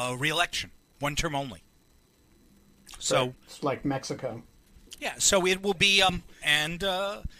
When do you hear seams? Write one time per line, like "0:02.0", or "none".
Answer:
0:06.4